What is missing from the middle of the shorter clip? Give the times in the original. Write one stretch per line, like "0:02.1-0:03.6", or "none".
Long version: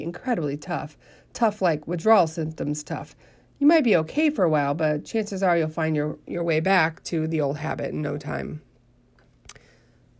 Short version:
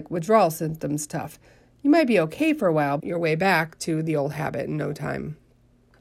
0:04.8-0:06.2